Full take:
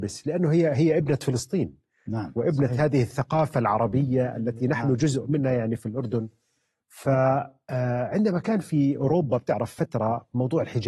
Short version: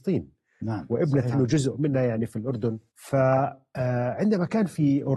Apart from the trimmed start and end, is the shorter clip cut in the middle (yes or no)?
yes